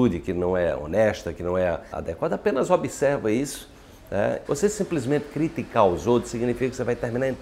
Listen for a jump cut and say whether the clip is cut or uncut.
cut